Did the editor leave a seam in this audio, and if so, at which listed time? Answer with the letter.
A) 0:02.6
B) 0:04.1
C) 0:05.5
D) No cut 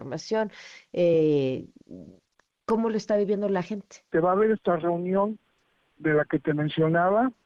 B